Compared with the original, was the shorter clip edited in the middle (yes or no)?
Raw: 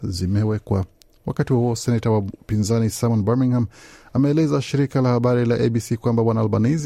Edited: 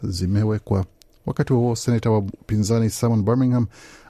no